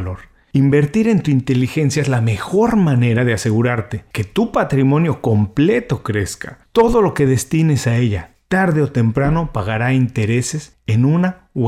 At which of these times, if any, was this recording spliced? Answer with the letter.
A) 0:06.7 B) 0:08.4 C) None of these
C